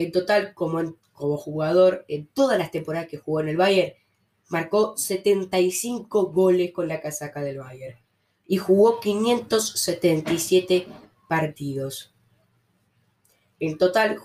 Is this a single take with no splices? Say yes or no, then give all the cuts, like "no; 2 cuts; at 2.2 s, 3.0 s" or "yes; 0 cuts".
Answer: yes; 0 cuts